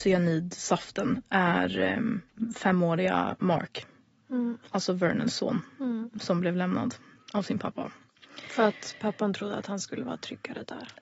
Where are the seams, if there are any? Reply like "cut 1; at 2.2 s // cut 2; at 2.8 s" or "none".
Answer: none